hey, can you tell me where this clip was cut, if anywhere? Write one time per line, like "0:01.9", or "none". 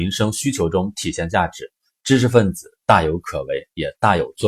0:01.9